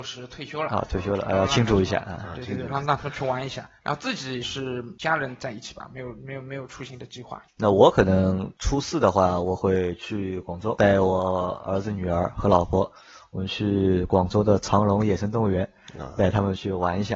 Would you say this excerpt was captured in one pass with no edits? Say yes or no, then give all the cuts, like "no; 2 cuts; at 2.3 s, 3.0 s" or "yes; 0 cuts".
yes; 0 cuts